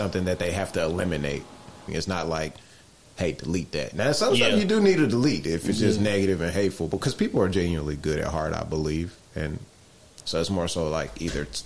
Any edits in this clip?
yes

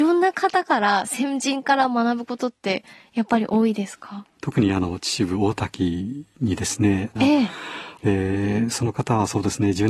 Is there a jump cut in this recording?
yes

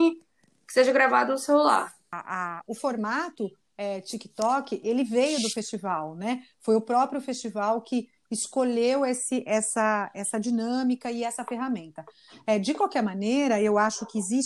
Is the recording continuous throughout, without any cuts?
yes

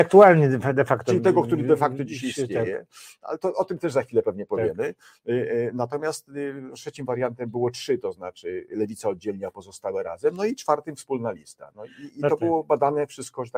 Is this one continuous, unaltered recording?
yes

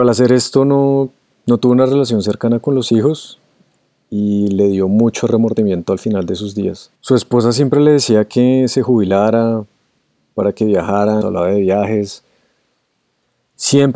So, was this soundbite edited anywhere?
yes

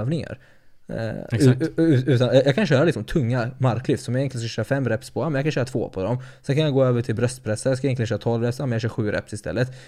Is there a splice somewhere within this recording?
no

